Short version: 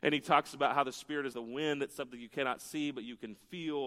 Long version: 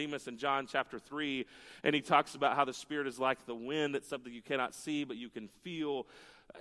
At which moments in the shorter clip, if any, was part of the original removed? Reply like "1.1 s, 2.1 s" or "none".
1.3 s